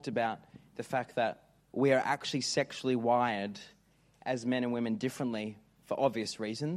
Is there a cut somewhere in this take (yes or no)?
no